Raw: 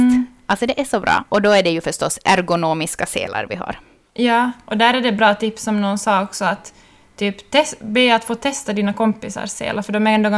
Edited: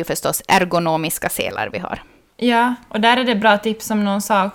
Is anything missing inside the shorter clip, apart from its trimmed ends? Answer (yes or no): no